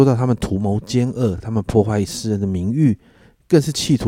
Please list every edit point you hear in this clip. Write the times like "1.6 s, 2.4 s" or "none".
none